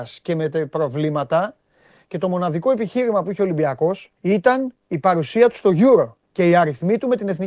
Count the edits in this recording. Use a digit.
2